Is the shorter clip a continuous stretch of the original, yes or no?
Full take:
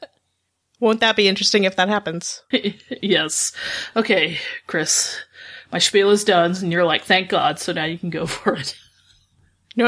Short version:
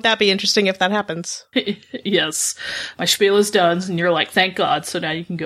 no